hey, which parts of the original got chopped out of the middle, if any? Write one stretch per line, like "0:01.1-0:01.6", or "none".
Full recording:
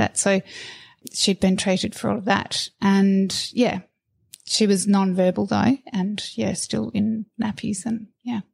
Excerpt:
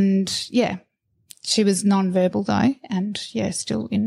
none